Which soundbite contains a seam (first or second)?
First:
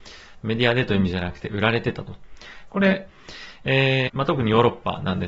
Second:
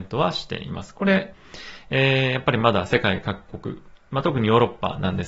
first